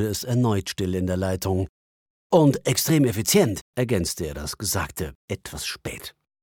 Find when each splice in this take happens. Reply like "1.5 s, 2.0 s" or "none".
2.1 s, 3.7 s